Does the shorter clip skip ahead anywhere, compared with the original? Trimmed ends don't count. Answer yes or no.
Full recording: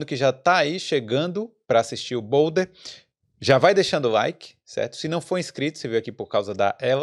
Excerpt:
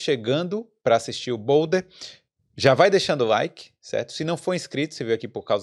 no